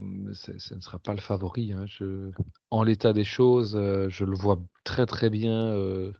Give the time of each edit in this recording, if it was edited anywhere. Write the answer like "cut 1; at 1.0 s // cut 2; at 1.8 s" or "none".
none